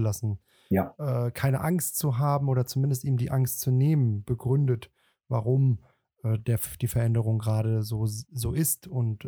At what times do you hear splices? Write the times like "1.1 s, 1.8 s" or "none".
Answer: none

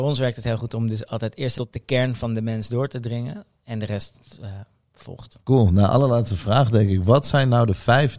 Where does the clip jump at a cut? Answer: 1.5 s, 5.4 s

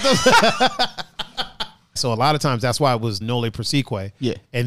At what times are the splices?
2.0 s, 3.2 s

